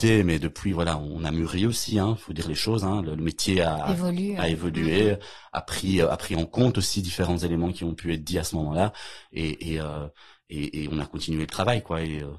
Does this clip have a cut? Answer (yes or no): no